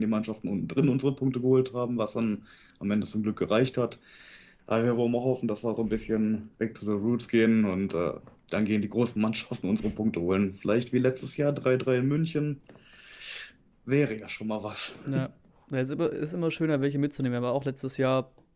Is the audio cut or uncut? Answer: uncut